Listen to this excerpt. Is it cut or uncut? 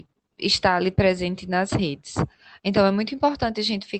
uncut